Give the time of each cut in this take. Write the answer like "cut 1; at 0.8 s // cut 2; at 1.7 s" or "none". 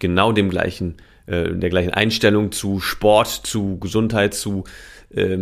none